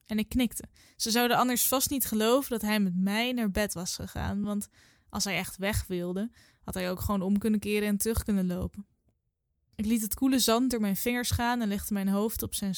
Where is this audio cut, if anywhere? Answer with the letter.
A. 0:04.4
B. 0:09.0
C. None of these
C